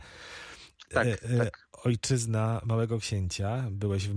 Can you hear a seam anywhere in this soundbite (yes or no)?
no